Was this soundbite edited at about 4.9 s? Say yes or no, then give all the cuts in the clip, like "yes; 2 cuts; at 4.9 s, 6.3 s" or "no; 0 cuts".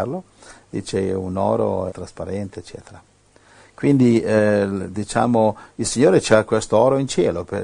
no; 1 cut; at 1.9 s